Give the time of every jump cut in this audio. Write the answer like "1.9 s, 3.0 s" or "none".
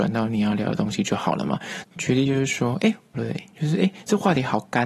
1.8 s, 3.1 s